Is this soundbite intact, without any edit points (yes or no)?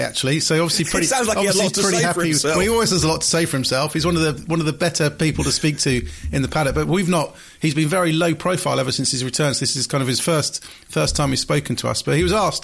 yes